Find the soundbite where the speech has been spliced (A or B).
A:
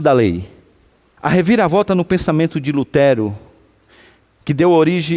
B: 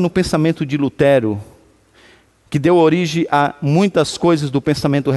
A